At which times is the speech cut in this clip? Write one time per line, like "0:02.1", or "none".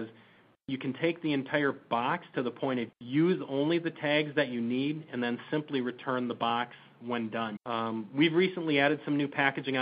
0:02.9
0:07.6